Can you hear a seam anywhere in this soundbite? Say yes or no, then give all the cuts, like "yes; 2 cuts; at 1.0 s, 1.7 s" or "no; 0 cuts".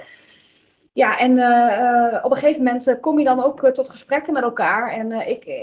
no; 0 cuts